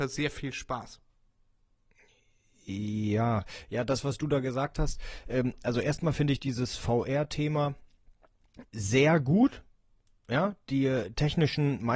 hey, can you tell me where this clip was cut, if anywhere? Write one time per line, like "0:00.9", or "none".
0:08.7